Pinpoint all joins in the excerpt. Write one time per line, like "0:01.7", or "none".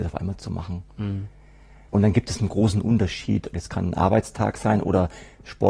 0:01.9
0:03.5